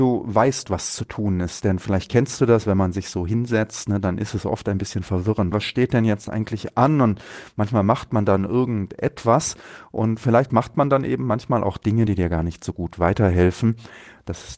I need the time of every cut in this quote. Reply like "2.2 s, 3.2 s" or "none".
5.5 s, 12.1 s